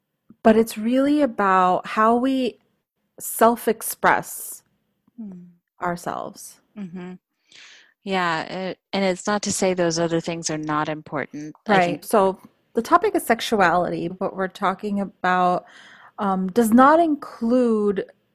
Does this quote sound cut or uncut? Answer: cut